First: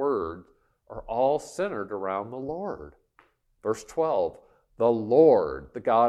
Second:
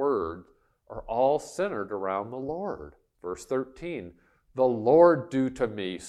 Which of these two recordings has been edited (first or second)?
second